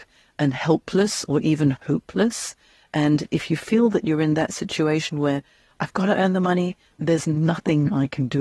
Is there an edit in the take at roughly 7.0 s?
yes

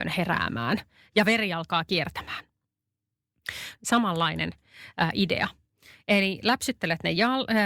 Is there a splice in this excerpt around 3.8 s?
yes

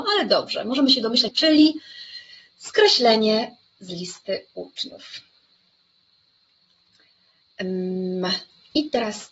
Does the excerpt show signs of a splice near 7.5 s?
no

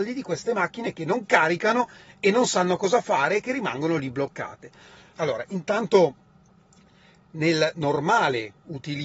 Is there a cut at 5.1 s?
yes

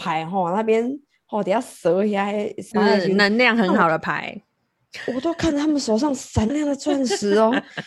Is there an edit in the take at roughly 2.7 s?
yes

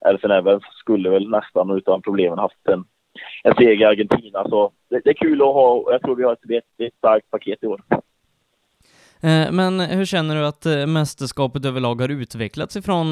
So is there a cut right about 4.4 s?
no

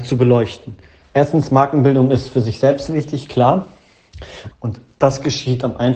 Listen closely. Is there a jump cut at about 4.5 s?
yes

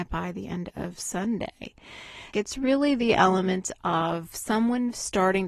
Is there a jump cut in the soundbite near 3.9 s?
no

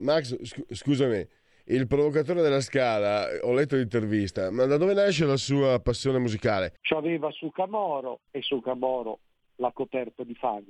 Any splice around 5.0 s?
no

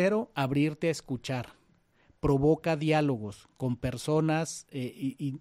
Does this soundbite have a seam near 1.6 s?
no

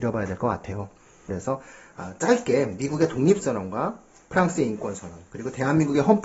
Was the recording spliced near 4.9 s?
no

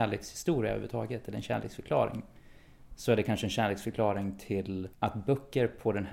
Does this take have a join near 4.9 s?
yes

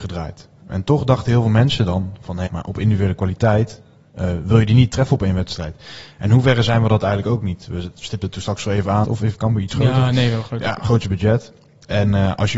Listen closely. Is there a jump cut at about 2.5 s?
yes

